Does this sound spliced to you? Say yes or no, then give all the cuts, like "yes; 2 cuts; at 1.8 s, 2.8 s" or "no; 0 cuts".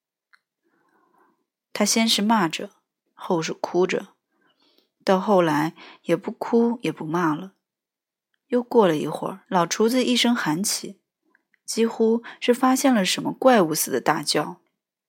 yes; 2 cuts; at 1.7 s, 9.4 s